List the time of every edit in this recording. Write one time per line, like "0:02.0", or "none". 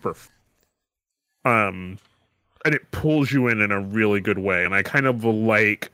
none